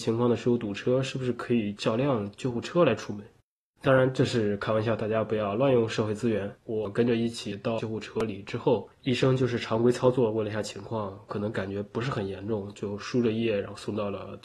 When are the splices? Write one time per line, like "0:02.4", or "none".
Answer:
0:06.6